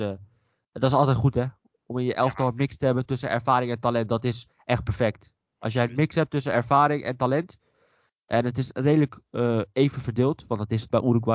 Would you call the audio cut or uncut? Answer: uncut